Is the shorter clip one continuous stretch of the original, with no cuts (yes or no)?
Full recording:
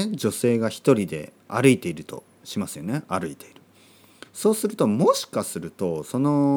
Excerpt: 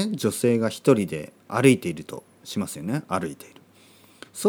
yes